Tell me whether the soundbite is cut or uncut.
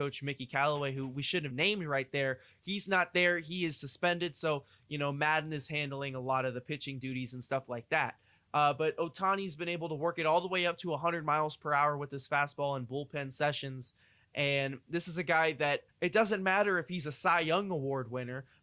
cut